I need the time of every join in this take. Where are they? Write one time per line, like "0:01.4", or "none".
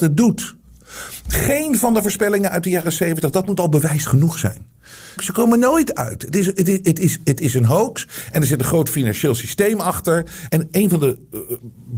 0:05.2
0:10.5